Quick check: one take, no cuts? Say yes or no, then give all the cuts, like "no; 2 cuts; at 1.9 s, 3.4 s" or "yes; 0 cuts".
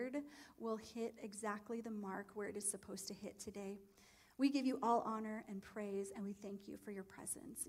yes; 0 cuts